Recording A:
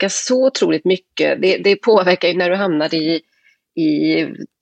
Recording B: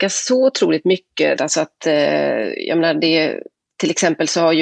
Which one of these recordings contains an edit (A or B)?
B